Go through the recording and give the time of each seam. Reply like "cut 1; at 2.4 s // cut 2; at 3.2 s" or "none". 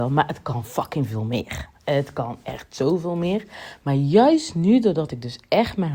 none